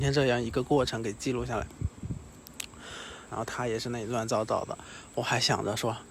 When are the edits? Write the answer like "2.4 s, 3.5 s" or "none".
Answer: 3.3 s